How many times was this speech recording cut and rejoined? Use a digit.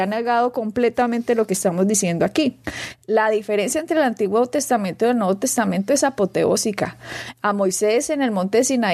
0